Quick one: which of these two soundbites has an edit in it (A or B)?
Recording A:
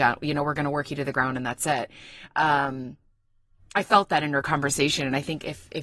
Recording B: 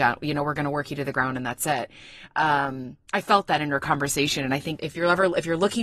B